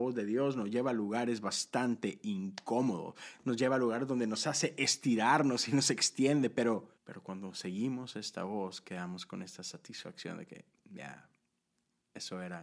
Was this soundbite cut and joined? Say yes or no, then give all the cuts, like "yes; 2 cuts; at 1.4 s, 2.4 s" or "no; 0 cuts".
yes; 1 cut; at 6.9 s